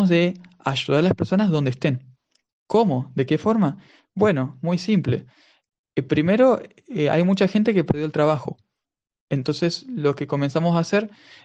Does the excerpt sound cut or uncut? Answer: uncut